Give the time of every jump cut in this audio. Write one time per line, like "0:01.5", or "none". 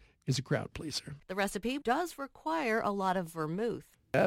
0:01.8